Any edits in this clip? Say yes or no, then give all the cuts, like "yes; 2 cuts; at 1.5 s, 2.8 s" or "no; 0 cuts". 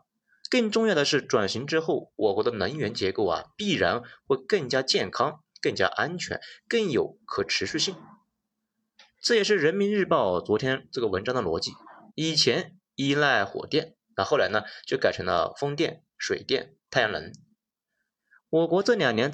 yes; 1 cut; at 12.1 s